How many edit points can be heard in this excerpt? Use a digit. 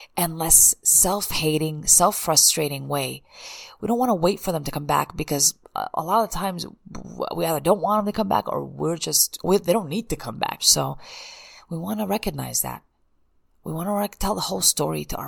2